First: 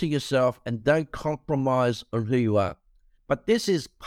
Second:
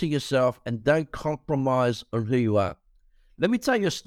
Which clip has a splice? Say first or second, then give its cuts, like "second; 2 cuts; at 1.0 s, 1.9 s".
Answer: first; 1 cut; at 3.2 s